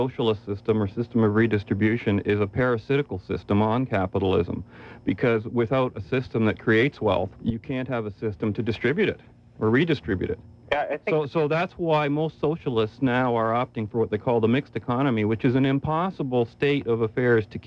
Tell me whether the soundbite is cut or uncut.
cut